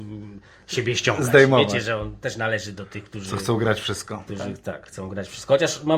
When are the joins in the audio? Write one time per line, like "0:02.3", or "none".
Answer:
none